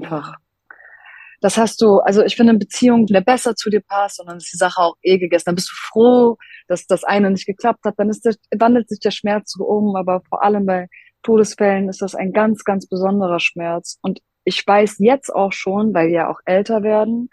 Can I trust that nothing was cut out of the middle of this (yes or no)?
no